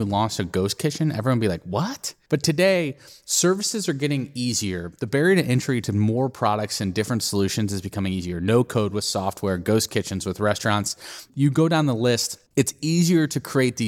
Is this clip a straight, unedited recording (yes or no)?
no